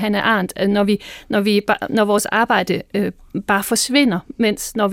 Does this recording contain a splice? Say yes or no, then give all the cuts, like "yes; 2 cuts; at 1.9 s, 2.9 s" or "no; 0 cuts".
no; 0 cuts